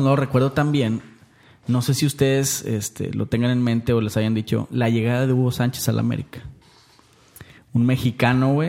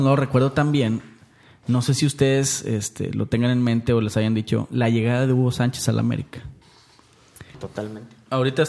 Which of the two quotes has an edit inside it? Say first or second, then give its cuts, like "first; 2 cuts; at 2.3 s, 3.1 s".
second; 1 cut; at 7.5 s